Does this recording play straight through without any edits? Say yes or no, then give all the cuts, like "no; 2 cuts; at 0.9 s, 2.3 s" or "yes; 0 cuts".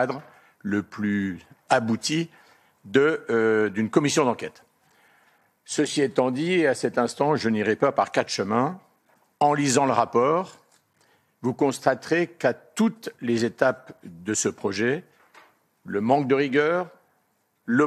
yes; 0 cuts